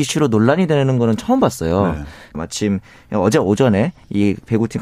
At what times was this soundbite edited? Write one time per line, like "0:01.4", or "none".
0:02.3